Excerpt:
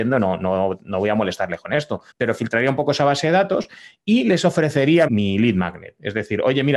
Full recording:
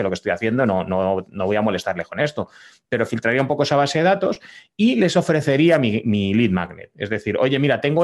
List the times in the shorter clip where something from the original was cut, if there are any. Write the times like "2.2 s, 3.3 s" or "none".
2.1 s, 5.1 s